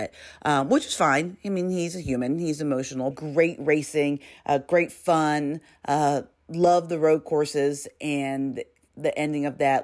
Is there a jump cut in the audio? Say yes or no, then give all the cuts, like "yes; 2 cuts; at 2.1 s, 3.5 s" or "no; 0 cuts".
yes; 1 cut; at 3.1 s